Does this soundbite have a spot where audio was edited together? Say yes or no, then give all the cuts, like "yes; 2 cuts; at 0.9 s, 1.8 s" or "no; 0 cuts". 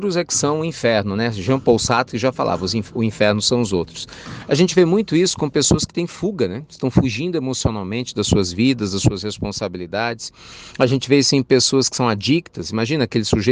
no; 0 cuts